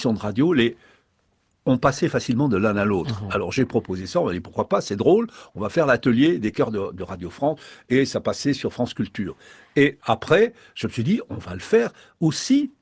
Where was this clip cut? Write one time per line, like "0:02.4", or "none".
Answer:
0:10.0